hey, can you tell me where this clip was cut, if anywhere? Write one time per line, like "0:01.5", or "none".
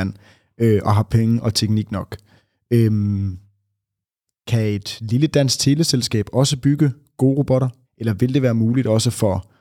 0:07.8